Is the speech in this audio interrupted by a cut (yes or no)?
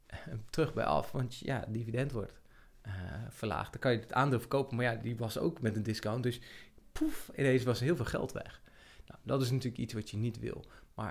no